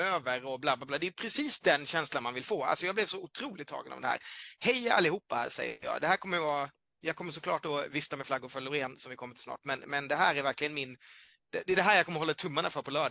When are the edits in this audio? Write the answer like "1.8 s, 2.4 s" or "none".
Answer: none